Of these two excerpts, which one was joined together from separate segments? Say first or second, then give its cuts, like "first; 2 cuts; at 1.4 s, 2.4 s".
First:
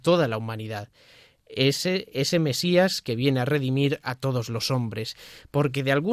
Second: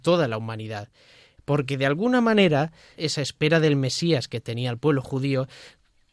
second; 2 cuts; at 1.4 s, 2.9 s